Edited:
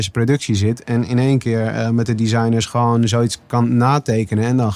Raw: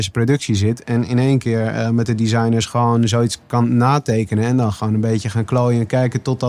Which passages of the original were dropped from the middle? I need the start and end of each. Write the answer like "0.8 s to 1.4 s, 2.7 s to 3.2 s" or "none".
none